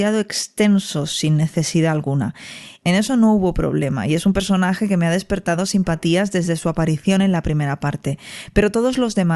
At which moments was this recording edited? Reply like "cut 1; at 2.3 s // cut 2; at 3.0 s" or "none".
cut 1; at 2.8 s